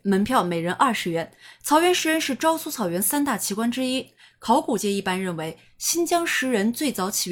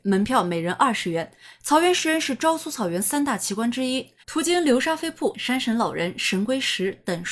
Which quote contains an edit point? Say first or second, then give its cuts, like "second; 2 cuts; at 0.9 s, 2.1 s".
second; 2 cuts; at 4.2 s, 5.3 s